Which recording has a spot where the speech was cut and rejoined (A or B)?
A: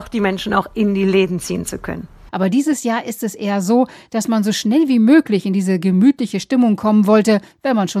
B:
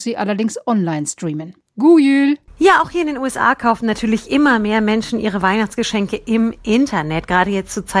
A